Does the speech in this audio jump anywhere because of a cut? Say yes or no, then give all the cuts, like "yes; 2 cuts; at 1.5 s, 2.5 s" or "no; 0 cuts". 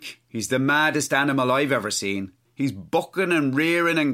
yes; 1 cut; at 2.4 s